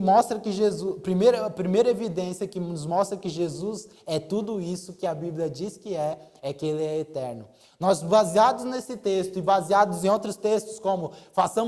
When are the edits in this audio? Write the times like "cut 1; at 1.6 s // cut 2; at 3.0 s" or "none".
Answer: none

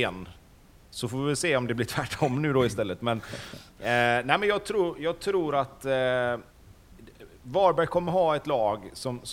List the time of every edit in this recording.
none

